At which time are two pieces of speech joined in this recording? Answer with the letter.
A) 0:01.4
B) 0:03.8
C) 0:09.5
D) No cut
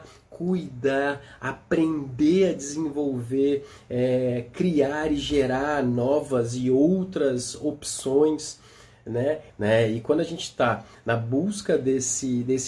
C